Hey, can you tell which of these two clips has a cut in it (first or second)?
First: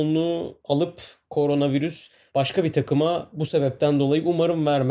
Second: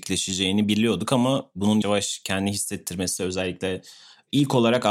second